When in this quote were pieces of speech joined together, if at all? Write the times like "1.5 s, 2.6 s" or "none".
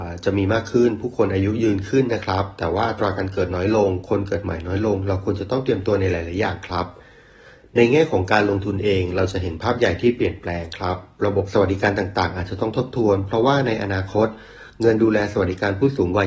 none